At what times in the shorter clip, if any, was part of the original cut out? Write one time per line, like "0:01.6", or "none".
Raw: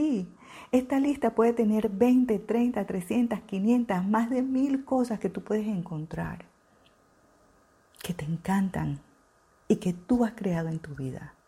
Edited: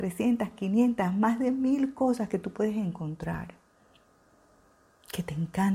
none